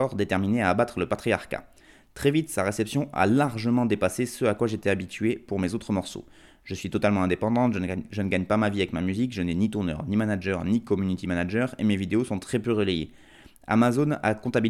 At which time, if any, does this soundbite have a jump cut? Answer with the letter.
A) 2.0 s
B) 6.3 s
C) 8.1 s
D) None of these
D